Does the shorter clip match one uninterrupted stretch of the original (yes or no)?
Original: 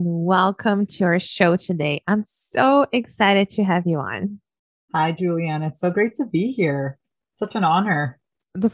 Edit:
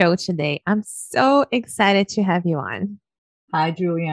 yes